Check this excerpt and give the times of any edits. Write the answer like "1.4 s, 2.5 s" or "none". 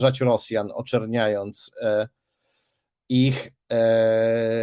none

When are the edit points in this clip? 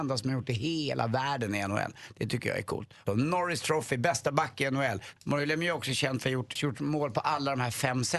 3.1 s, 5.2 s, 6.6 s

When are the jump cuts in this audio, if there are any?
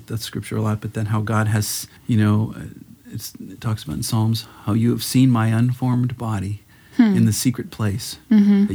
2.0 s

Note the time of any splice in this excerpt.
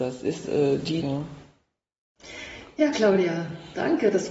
1.0 s

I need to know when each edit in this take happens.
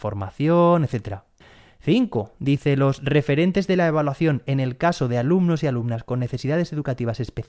none

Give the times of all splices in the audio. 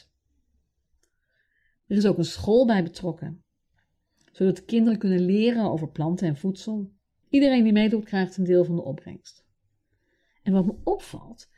7.2 s

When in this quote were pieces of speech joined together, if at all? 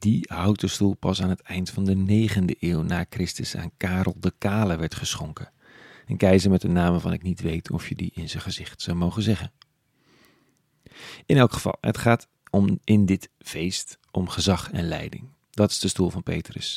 none

